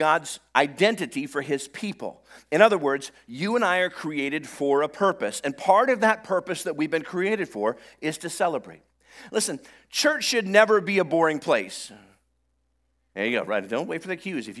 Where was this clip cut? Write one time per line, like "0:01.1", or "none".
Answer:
none